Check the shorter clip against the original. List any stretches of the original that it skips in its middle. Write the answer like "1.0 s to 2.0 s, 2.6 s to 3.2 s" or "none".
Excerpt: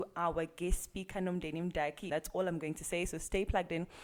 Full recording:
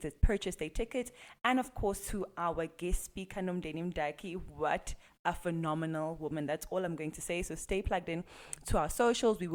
4.3 s to 6.5 s